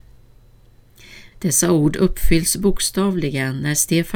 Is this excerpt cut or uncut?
cut